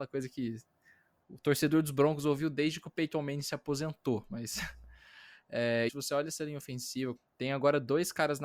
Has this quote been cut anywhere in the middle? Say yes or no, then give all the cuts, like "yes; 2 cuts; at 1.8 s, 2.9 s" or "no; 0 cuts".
yes; 2 cuts; at 5.9 s, 7.2 s